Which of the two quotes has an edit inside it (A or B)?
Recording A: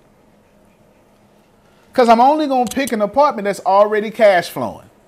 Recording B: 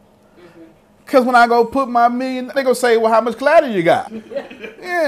B